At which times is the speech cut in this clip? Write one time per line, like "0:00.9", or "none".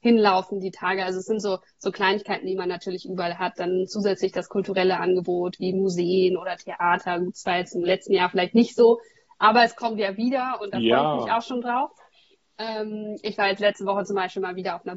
none